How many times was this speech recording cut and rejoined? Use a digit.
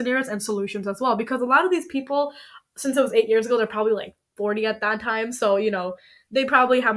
0